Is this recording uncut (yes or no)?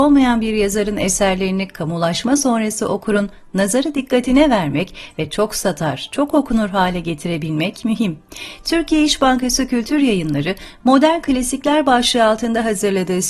yes